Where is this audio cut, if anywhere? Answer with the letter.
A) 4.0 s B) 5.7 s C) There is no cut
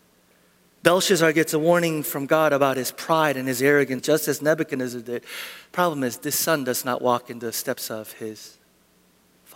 A